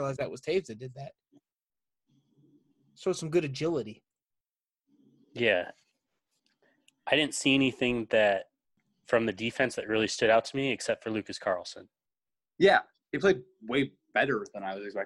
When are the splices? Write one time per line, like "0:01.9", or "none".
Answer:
0:13.0